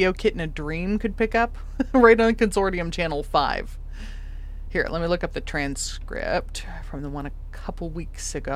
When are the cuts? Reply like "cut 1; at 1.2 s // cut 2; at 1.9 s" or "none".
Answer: none